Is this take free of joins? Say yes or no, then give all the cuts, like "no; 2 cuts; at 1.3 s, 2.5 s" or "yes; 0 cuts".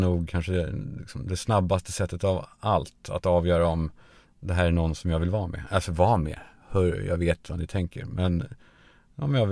yes; 0 cuts